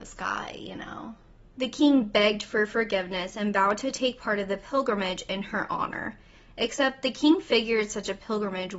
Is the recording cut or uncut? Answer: cut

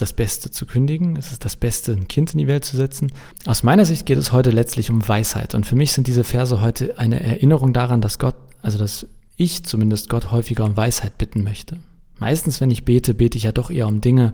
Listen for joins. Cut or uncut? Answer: cut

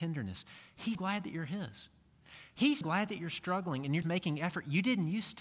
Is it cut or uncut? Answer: cut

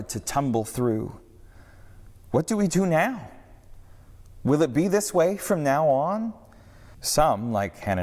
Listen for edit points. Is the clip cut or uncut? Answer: cut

